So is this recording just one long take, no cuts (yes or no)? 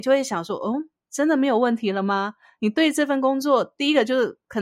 yes